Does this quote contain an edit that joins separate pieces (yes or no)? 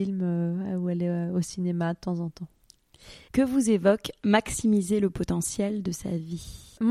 yes